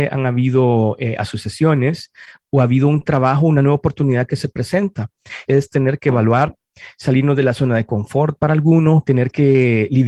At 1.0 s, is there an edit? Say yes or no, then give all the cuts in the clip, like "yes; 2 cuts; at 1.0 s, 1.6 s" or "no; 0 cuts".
no; 2 cuts; at 5.5 s, 9.0 s